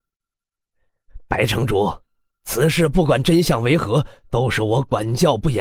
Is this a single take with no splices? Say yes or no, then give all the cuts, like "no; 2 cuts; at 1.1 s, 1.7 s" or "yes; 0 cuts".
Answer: yes; 0 cuts